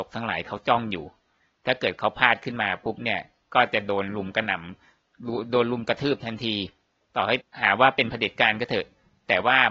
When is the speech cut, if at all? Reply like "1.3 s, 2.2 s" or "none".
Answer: none